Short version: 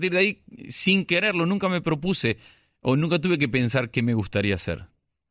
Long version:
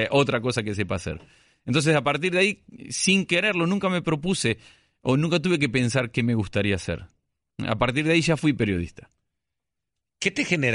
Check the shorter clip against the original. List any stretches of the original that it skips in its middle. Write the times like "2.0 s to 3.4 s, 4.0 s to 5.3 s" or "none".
none